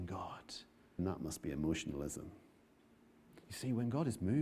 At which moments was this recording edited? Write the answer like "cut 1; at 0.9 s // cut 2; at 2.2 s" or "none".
cut 1; at 1.0 s